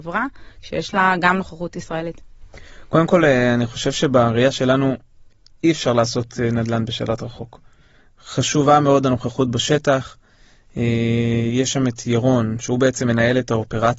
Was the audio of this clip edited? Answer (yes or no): no